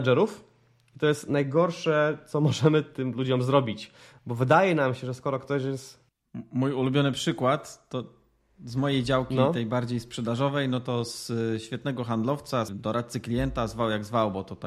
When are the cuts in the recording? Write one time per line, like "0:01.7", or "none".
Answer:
0:12.7